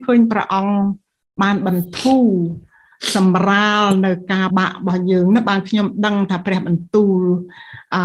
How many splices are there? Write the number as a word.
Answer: one